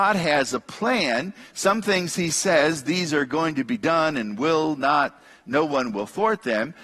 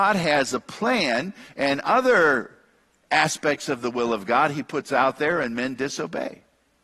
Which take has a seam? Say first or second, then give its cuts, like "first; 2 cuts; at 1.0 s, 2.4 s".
second; 1 cut; at 1.5 s